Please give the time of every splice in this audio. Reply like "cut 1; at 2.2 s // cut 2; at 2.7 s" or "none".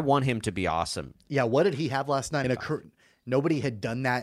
cut 1; at 1.1 s // cut 2; at 2.4 s